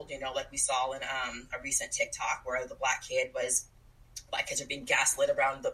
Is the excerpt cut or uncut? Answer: uncut